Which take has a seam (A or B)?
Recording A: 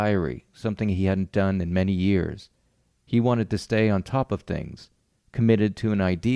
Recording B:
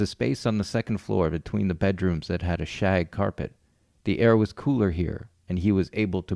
A